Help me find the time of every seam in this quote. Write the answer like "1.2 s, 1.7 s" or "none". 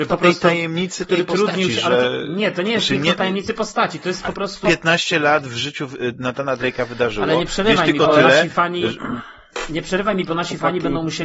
4.6 s